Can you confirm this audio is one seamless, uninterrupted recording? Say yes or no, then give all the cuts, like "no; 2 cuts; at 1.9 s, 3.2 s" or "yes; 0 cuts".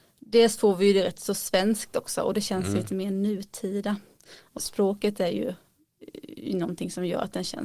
no; 1 cut; at 4.6 s